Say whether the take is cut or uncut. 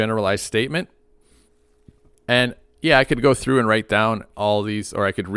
cut